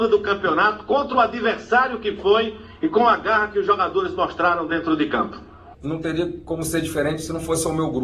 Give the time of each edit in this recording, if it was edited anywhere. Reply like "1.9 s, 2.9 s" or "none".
5.7 s